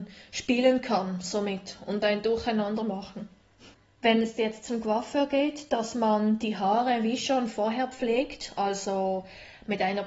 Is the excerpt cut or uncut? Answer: cut